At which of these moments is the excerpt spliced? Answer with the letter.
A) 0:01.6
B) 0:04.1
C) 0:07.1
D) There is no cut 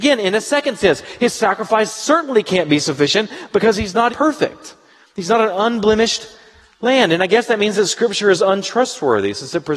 B